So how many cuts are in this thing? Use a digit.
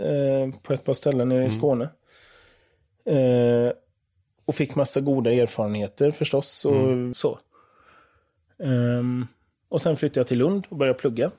1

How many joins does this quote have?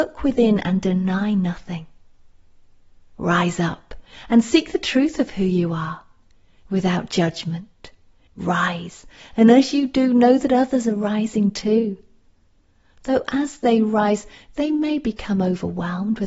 1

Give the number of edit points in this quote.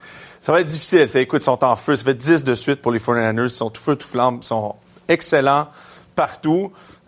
0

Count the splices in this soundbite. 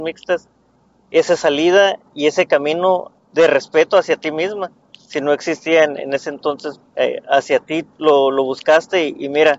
1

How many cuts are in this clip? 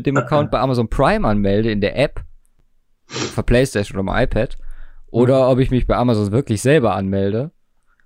0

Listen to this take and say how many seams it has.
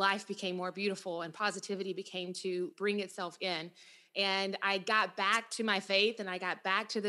1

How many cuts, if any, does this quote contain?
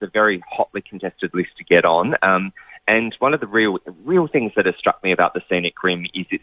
0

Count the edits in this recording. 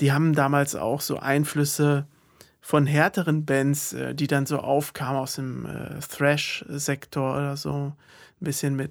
0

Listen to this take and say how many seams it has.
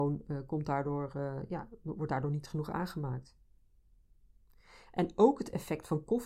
0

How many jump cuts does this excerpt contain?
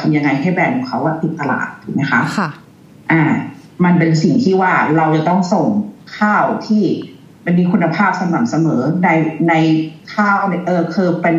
0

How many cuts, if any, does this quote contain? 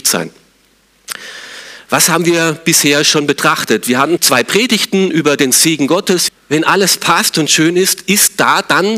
2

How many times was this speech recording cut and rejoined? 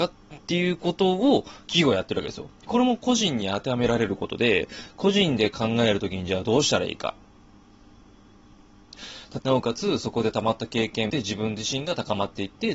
2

